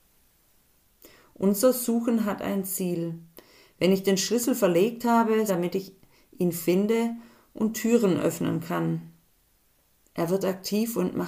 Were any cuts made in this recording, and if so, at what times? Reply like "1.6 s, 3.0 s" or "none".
5.5 s, 10.0 s